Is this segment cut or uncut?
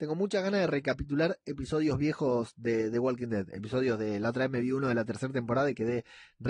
uncut